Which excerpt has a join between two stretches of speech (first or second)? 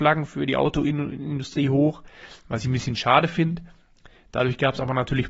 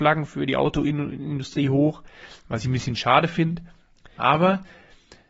second